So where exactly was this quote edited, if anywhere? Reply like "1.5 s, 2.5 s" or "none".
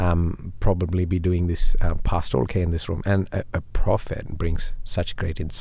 none